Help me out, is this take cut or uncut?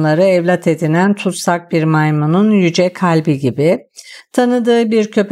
uncut